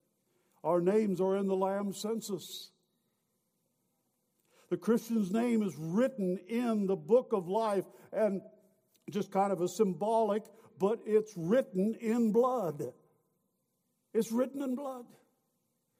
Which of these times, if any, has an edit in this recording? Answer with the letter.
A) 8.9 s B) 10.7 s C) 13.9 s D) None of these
B